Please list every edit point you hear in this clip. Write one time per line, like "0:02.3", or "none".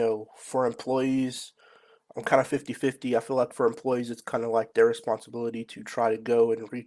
none